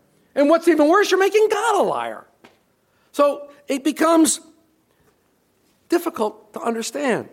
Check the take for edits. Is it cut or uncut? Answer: uncut